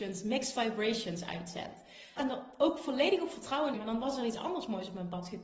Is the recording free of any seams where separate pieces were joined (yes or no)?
no